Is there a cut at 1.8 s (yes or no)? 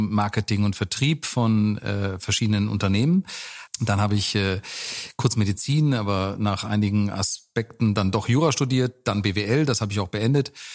no